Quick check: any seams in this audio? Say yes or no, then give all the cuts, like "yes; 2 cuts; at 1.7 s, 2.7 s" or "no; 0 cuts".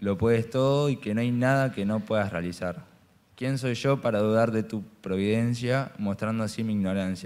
no; 0 cuts